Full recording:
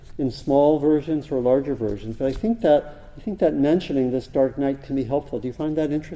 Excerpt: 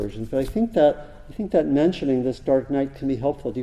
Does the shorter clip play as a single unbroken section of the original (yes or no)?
yes